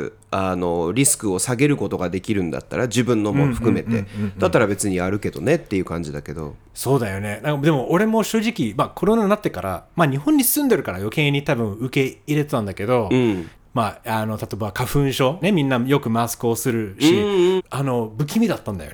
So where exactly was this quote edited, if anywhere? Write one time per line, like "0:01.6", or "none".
0:13.5
0:15.4
0:17.6